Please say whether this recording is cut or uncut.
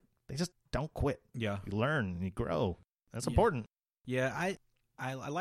uncut